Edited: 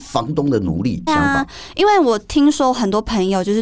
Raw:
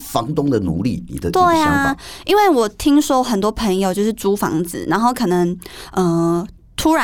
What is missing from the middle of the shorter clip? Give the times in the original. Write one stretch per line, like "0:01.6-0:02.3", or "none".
0:01.1-0:01.6